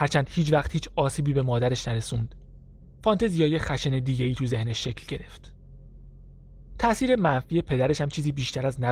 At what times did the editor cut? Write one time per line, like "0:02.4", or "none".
none

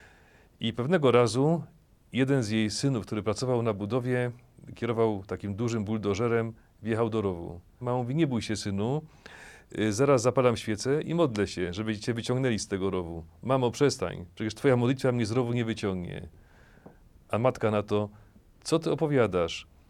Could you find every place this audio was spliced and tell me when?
0:07.8

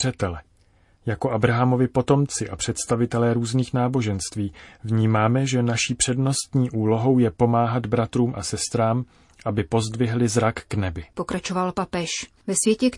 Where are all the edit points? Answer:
0:11.1

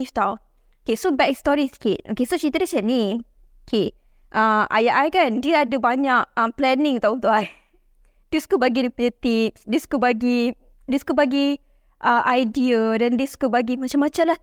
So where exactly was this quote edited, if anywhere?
none

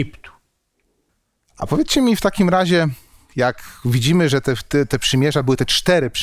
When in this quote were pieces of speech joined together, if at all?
none

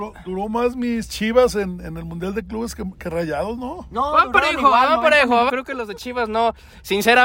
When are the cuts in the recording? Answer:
0:05.5

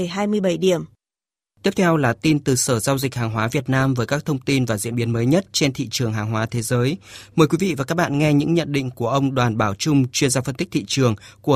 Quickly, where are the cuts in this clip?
none

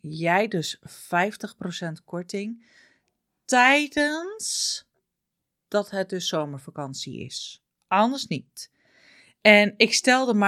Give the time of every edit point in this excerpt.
none

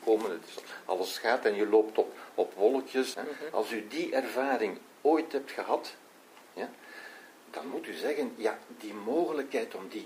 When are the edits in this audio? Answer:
0:03.1

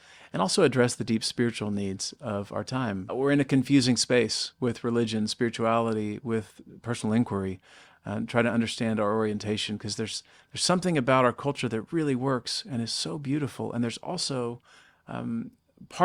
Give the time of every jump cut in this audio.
0:03.1

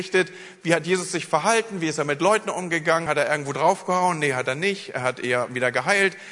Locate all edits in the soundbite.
none

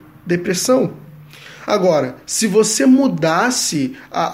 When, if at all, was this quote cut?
none

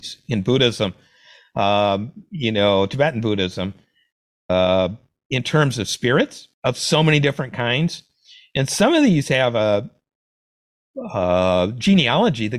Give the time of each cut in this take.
0:06.5

